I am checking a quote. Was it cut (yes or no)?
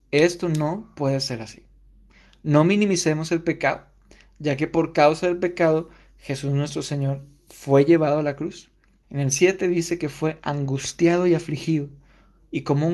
yes